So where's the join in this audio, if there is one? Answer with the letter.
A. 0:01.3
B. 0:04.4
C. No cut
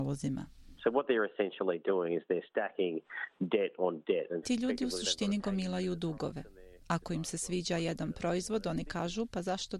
B